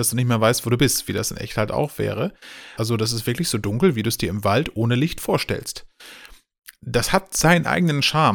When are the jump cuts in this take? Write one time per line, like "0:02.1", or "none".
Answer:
0:02.7